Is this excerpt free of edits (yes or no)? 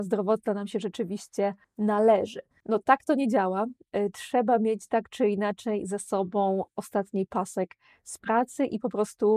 no